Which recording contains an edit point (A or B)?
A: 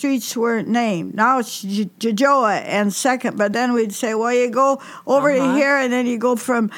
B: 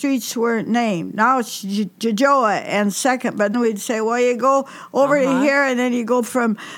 B